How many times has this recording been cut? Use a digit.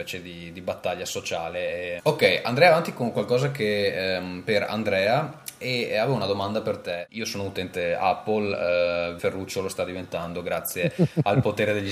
2